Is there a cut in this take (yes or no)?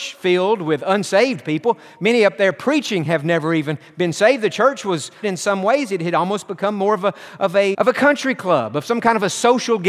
yes